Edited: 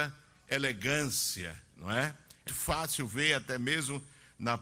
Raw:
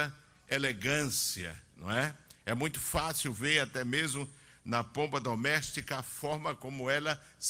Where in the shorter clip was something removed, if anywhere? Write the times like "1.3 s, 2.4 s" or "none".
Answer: 2.5 s